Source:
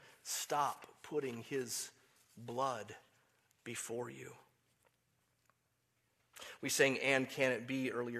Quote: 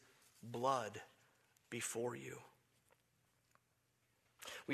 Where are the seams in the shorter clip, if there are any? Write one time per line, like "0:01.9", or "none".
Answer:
none